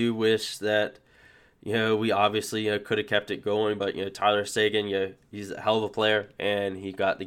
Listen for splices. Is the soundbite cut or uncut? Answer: uncut